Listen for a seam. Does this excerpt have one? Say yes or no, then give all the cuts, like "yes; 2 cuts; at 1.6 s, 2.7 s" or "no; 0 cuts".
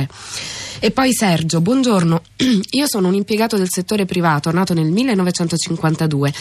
no; 0 cuts